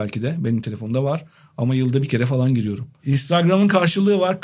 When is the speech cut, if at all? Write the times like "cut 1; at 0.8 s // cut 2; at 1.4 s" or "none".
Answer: cut 1; at 3.0 s